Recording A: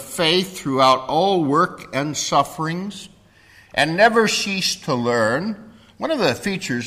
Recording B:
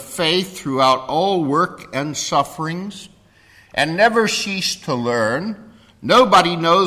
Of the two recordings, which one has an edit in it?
A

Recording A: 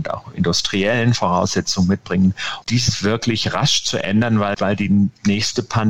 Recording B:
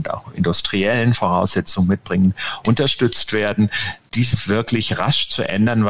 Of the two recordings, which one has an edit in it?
A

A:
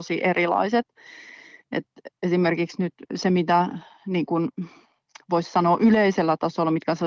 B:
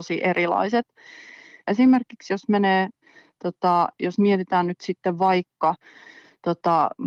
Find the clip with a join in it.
B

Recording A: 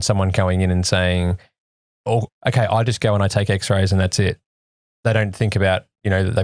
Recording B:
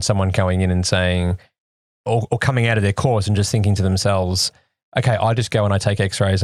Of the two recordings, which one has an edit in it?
A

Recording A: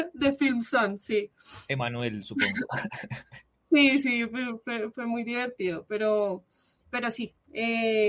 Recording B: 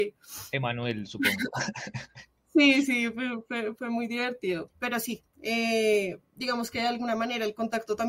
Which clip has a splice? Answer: B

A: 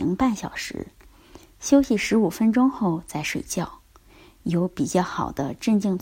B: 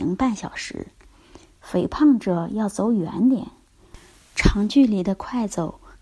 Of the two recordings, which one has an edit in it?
B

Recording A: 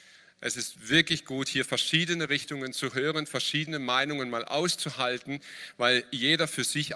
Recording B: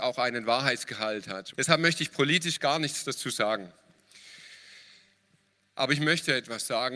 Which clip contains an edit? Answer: B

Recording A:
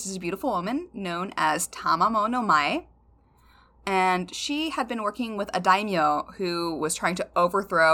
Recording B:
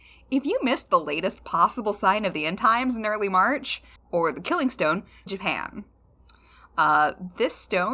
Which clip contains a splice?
B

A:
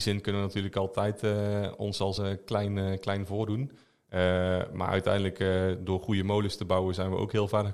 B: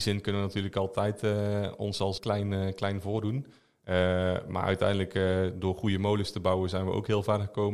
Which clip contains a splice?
B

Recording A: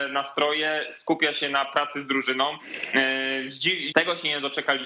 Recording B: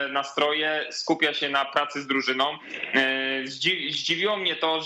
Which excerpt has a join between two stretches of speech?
A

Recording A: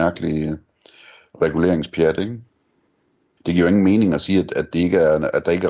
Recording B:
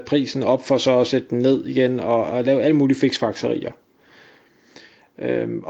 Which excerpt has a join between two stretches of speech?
A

